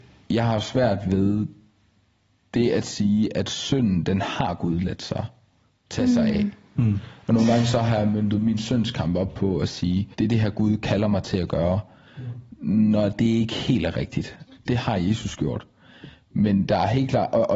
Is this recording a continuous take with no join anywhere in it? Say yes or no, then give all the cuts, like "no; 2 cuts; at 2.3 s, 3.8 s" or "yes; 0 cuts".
no; 2 cuts; at 10.1 s, 14.6 s